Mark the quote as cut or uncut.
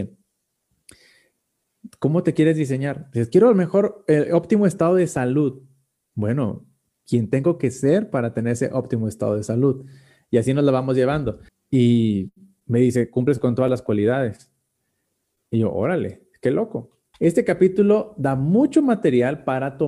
cut